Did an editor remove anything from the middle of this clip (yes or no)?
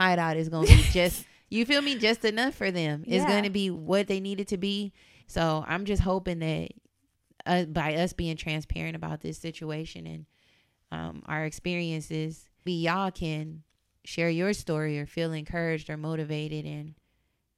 yes